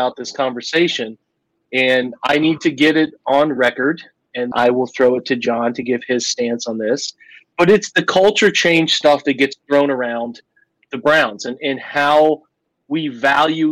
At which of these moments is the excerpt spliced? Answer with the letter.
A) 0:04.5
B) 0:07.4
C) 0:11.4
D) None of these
A